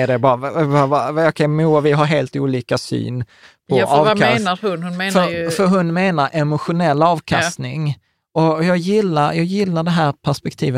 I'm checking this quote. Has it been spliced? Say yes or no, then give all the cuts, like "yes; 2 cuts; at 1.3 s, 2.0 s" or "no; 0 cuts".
no; 0 cuts